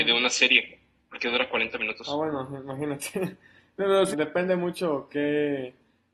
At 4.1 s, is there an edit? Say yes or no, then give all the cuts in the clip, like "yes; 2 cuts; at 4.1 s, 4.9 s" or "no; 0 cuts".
yes; 1 cut; at 4.1 s